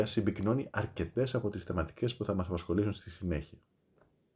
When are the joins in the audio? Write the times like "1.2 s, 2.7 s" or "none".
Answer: none